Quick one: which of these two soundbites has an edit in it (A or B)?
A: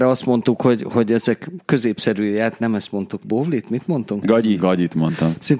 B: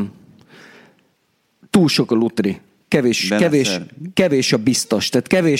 A